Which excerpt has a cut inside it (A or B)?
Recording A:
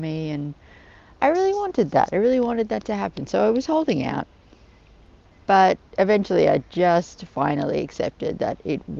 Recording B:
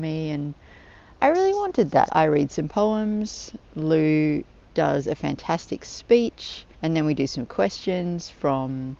B